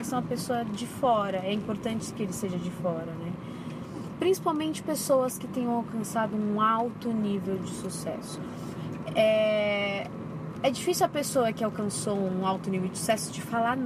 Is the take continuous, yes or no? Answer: yes